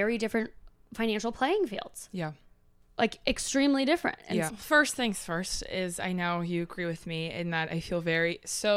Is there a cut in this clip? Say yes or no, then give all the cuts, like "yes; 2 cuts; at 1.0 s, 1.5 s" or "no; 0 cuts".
yes; 1 cut; at 4.5 s